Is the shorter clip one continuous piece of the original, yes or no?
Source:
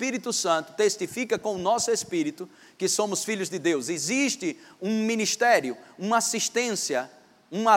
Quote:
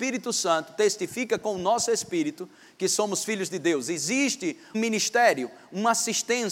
no